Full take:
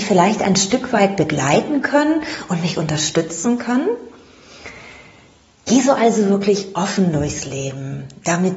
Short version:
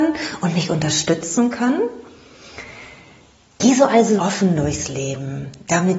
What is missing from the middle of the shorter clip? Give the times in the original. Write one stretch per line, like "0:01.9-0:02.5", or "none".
0:06.2-0:06.7